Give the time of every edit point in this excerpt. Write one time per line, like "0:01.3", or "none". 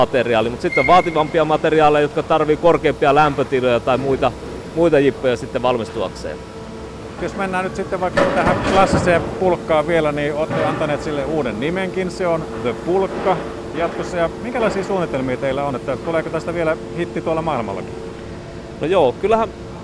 none